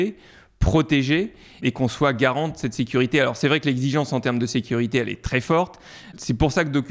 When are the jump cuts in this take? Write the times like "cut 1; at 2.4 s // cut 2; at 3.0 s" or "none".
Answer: none